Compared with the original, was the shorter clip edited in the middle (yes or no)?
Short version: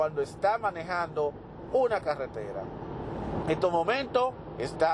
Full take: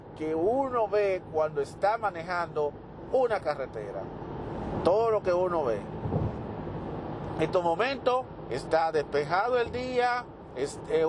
yes